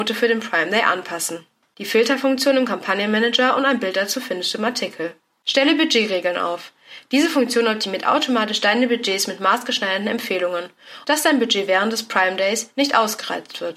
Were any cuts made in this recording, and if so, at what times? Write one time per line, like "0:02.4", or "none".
0:11.0